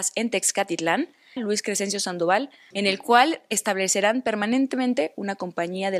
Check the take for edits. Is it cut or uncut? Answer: cut